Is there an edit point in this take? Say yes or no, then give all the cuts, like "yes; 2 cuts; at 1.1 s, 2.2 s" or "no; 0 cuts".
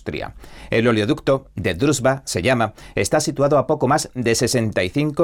no; 0 cuts